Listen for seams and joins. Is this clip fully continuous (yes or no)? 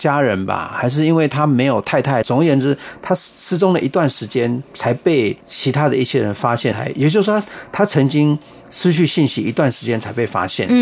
no